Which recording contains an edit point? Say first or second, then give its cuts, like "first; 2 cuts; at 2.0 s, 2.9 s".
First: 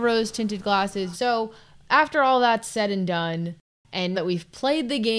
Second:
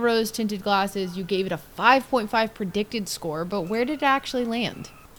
first; 2 cuts; at 1.1 s, 4.1 s